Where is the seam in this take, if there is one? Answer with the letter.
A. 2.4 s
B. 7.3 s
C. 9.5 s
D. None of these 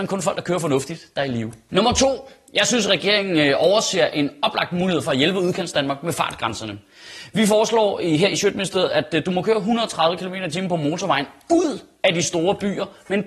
D